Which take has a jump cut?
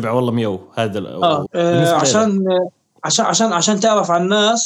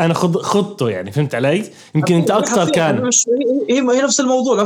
first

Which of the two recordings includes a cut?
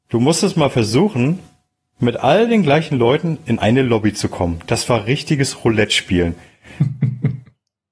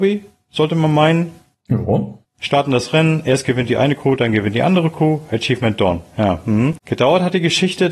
second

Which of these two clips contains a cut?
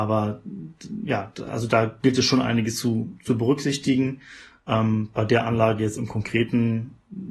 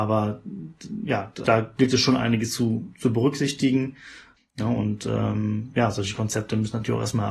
second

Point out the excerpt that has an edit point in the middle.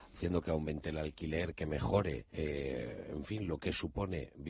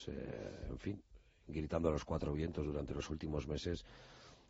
first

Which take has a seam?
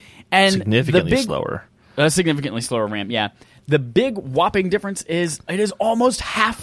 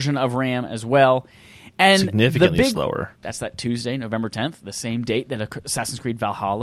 second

